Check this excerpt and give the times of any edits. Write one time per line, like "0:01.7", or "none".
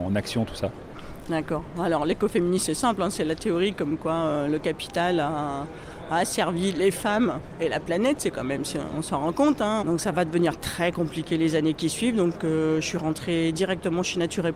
0:09.8